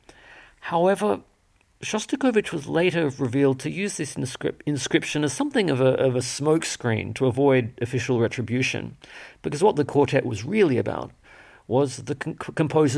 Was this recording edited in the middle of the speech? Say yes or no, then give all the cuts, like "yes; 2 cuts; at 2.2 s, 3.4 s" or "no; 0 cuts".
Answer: no; 0 cuts